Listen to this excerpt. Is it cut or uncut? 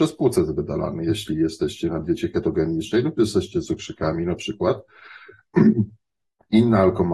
uncut